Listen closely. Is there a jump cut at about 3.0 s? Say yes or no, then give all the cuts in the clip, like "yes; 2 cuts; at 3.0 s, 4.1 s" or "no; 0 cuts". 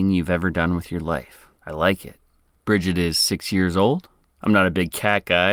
no; 2 cuts; at 1.6 s, 4.2 s